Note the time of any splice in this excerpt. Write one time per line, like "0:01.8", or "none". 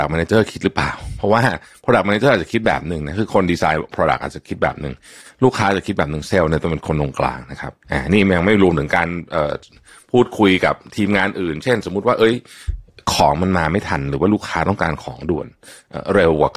0:07.8